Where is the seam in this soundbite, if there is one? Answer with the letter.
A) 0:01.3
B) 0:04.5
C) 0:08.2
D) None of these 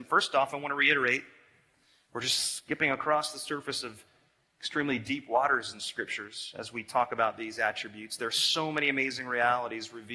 D